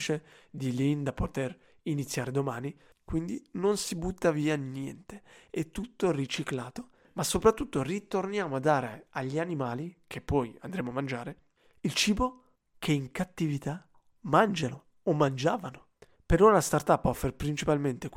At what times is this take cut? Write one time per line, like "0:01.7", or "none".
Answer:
0:02.9